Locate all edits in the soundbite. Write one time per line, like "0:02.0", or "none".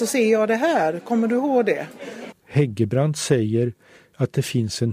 0:02.3

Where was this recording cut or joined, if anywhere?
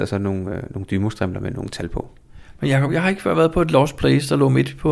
none

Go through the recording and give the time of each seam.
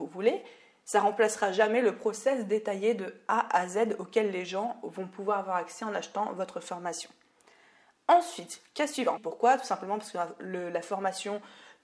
0:09.2

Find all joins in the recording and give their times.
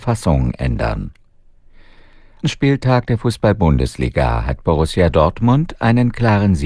0:02.4

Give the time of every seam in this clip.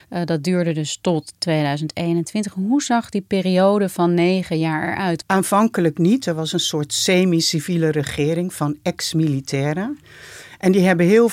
0:05.2

